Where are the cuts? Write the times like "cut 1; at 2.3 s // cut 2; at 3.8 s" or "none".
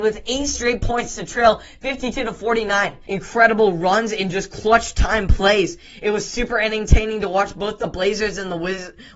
cut 1; at 3.1 s